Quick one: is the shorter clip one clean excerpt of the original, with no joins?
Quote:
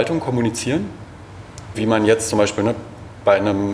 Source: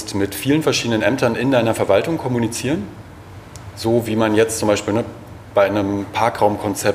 no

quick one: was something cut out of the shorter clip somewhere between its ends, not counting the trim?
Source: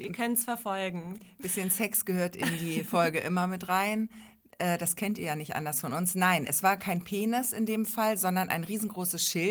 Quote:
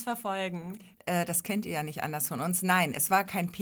yes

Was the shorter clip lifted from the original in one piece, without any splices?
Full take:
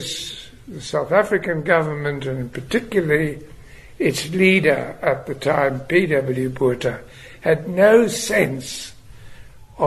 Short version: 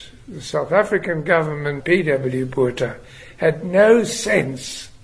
no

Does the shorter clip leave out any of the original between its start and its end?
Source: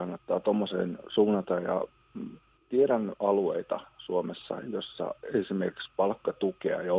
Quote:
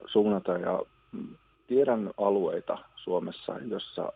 no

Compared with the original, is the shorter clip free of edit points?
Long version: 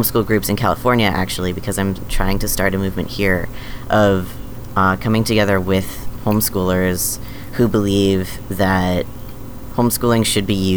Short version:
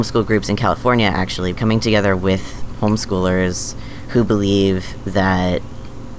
no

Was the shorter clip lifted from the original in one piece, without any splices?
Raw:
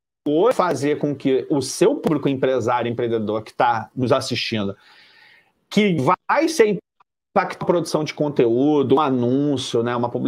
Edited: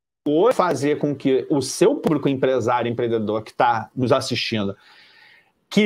yes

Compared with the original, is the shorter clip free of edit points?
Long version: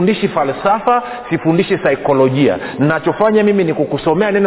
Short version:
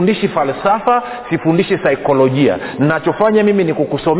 yes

